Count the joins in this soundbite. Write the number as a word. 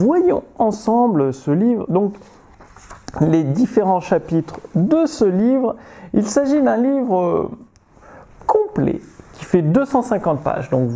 zero